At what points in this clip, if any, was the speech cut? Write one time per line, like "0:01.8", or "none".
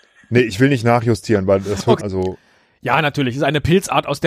0:02.0